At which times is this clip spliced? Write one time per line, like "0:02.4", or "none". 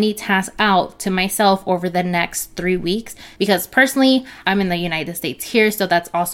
0:03.4